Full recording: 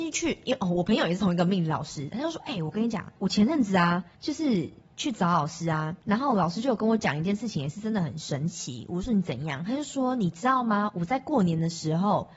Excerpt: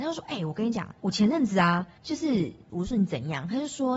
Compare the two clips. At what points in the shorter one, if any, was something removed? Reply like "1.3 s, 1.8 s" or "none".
2.7 s